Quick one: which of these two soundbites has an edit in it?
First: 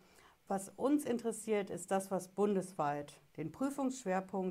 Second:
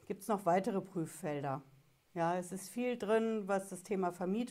first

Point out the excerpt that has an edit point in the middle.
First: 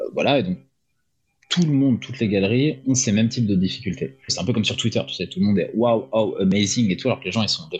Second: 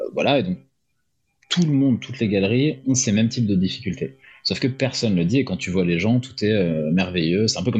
first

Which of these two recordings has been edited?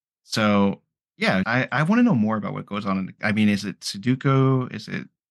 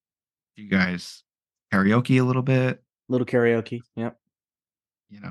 first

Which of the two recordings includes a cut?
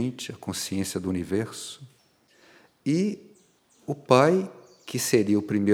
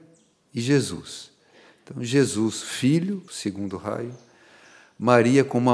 second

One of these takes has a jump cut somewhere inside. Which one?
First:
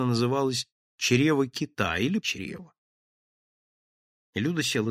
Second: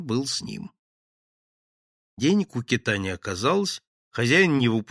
first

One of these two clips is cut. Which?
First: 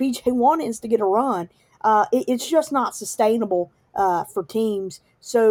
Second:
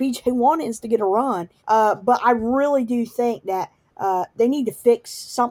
second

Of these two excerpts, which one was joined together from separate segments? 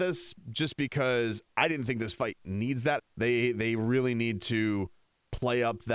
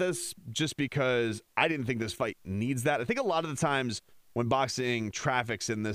first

